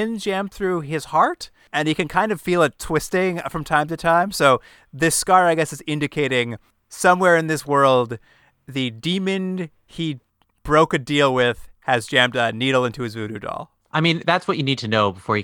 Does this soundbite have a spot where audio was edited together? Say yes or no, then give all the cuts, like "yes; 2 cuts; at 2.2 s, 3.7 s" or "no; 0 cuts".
no; 0 cuts